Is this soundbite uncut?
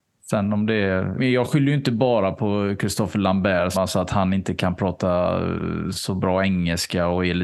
no; 2 cuts; at 1.2 s, 3.7 s

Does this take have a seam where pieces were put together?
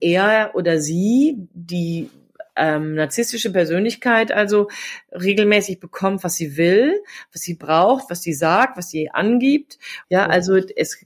yes; 1 cut; at 10.0 s

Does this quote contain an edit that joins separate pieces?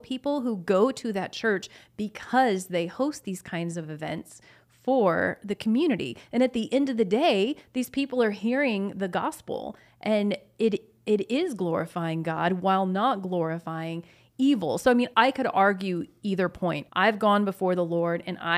yes; 2 cuts; at 15.1 s, 16.9 s

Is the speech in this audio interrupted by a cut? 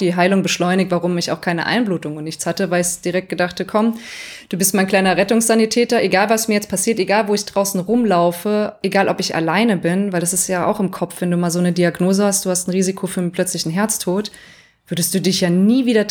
no; 0 cuts

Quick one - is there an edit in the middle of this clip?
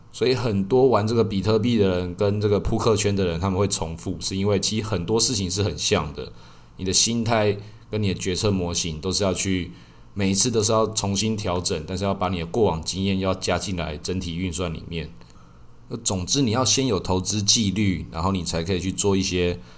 no; 0 cuts

